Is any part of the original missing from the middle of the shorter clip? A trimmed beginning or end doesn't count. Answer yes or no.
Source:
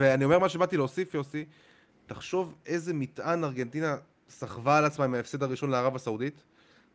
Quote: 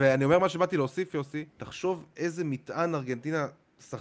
yes